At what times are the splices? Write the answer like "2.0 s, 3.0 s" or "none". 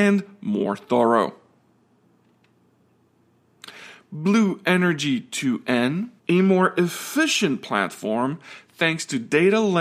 6.2 s